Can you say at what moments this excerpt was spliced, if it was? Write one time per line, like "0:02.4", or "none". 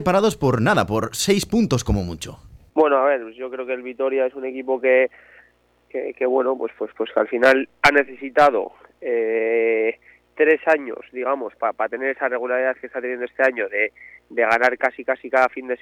0:02.7